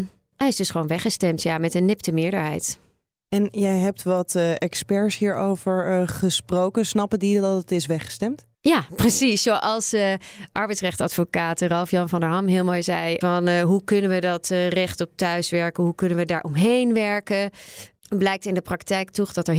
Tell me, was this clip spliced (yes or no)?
yes